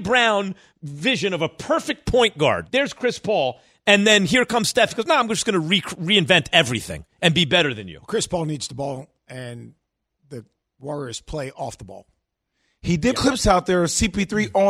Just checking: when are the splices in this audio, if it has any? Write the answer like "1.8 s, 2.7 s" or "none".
2.7 s, 13.1 s